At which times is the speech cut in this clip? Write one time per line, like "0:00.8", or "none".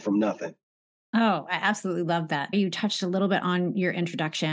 0:02.5